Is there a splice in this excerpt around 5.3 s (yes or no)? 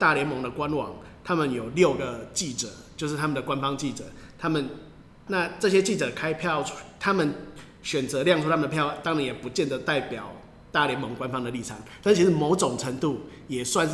yes